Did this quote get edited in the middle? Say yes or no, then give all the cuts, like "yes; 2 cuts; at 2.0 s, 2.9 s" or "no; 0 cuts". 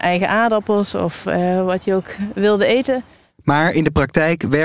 no; 0 cuts